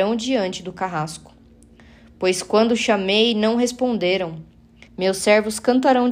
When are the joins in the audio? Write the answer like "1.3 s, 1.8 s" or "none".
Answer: 4.9 s